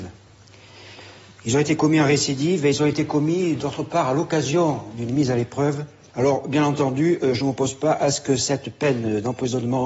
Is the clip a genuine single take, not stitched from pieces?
no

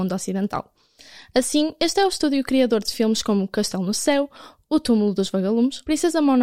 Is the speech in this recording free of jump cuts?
yes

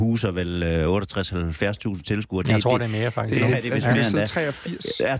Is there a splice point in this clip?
no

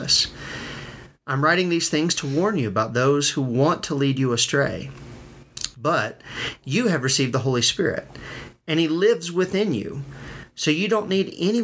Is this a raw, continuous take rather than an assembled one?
yes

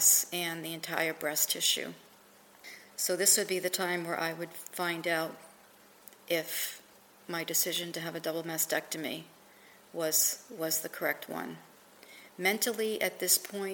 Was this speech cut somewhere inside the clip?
no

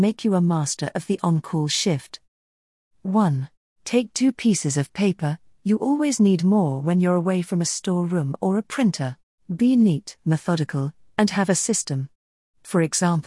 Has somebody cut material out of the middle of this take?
yes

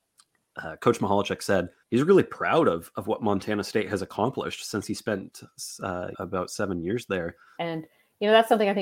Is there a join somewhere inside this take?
yes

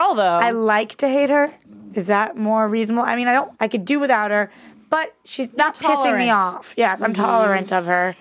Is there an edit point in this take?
yes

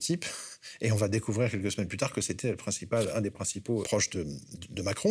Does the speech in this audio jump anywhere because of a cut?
yes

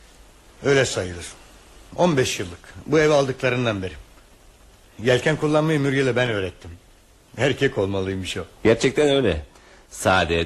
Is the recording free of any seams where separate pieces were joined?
yes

